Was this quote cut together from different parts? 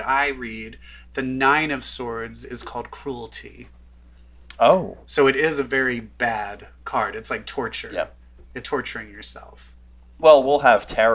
yes; 1 cut; at 8.6 s

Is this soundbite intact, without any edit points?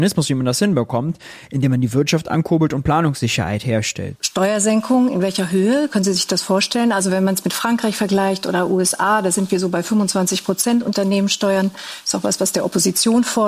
no; 1 cut; at 4.2 s

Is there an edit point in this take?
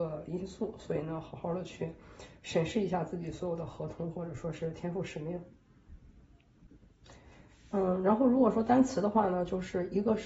no; 0 cuts

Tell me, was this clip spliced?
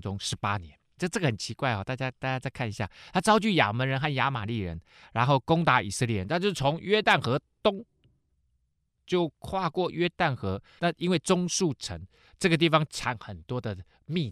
yes; 2 cuts; at 1.0 s, 10.8 s

